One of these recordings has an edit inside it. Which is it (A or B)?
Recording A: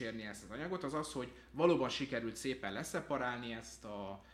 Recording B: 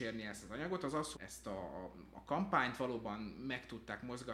B